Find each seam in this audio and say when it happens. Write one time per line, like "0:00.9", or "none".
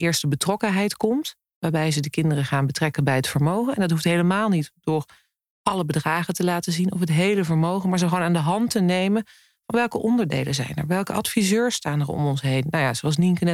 none